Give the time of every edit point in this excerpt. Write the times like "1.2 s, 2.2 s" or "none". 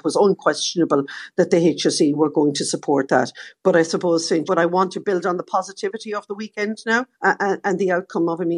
4.5 s, 7.1 s